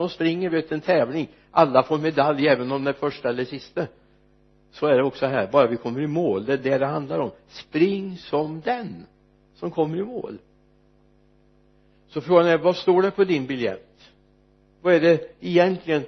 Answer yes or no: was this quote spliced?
no